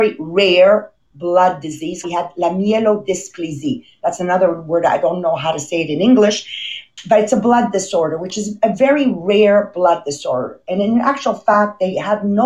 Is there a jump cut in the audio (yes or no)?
yes